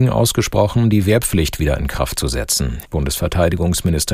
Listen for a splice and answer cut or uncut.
cut